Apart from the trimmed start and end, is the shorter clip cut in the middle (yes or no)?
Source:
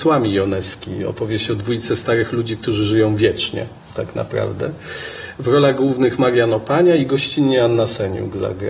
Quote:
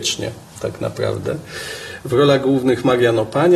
no